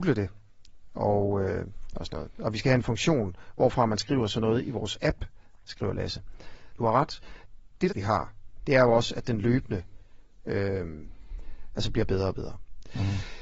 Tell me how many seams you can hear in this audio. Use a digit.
2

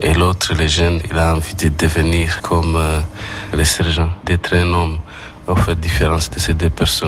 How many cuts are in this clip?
2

